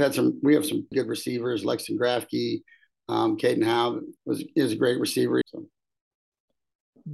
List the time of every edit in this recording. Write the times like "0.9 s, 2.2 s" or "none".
0.9 s, 4.2 s, 5.4 s